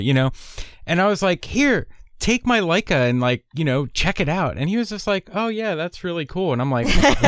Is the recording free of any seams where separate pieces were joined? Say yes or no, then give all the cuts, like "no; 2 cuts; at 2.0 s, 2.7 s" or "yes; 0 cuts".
yes; 0 cuts